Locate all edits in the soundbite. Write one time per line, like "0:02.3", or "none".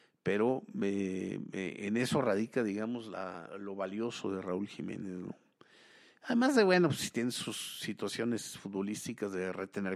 none